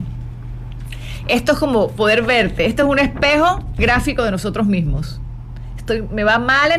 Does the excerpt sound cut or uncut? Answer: uncut